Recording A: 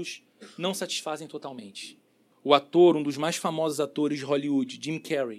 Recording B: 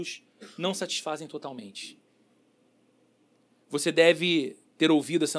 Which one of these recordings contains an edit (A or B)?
A